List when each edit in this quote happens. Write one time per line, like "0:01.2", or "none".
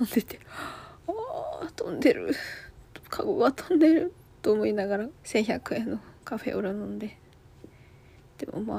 0:05.2